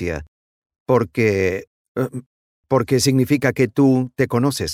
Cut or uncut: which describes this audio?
uncut